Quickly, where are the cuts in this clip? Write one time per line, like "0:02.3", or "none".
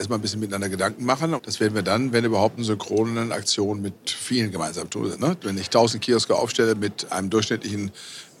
0:01.4
0:02.6
0:05.1